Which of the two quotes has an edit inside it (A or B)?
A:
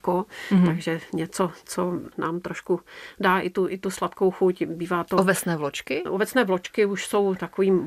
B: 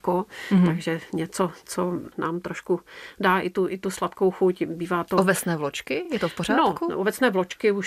A